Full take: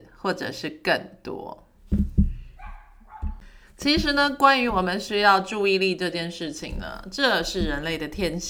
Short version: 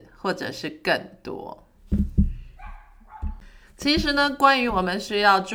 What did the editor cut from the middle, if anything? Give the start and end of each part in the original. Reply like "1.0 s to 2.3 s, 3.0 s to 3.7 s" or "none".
none